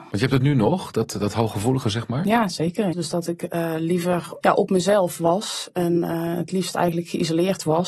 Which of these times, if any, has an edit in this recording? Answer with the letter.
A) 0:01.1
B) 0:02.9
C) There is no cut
B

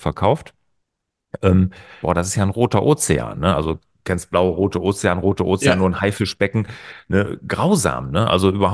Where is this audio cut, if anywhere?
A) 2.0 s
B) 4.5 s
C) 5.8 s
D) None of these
A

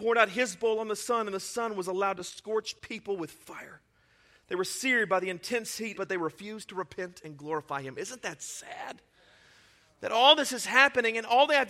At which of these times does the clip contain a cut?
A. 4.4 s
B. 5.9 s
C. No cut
B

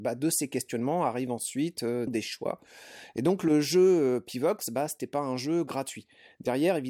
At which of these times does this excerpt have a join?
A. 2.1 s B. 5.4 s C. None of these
A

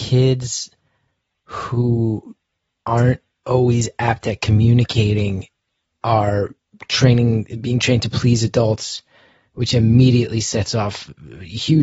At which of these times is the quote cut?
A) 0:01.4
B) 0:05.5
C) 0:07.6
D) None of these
D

